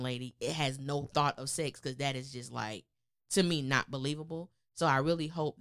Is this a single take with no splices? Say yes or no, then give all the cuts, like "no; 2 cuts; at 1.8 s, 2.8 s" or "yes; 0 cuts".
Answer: yes; 0 cuts